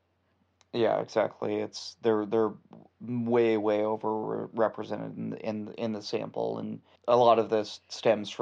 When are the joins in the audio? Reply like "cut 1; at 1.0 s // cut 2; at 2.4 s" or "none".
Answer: cut 1; at 7.0 s